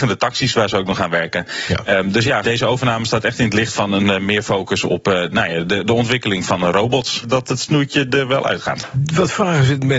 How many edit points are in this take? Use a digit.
2